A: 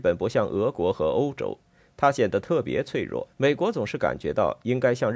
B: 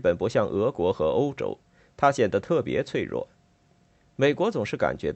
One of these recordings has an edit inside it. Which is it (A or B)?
A